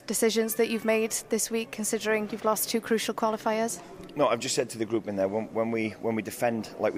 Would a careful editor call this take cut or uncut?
uncut